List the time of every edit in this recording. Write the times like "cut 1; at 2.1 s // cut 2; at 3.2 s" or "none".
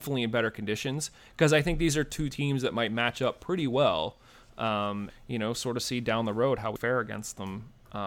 cut 1; at 5.1 s // cut 2; at 6.8 s

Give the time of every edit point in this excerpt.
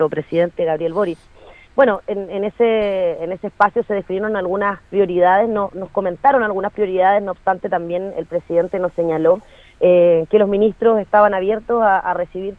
none

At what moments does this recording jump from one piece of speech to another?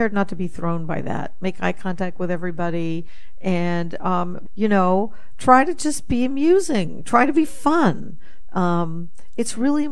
cut 1; at 4.5 s

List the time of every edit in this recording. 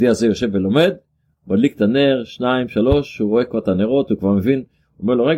none

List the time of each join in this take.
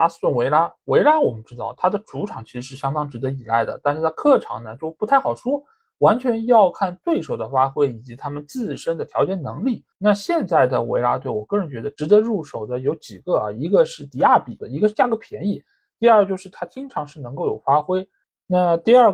cut 1; at 9.9 s // cut 2; at 14.6 s

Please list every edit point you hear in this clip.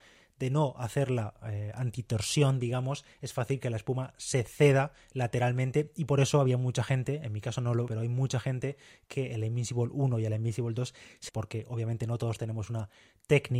cut 1; at 7.9 s // cut 2; at 11.3 s

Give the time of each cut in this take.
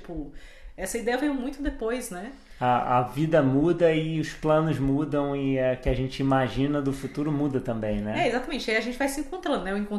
none

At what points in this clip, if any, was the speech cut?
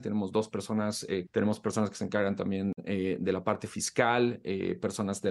cut 1; at 1.3 s

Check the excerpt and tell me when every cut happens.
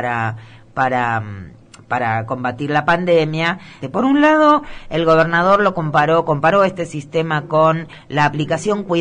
cut 1; at 3.8 s

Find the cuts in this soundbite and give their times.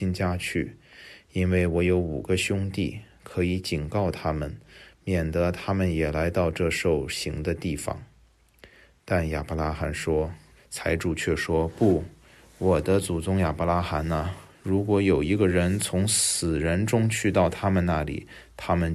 cut 1; at 10.6 s

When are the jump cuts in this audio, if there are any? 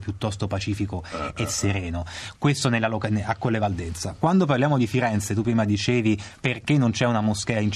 none

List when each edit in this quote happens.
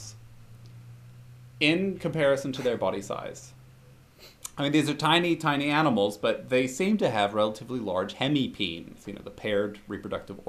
none

